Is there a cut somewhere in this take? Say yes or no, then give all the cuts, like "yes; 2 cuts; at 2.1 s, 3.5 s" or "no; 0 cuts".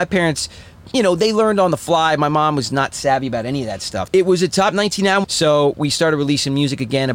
yes; 2 cuts; at 4.1 s, 5.2 s